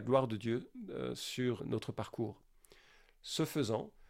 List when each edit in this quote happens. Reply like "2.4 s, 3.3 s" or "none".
1.6 s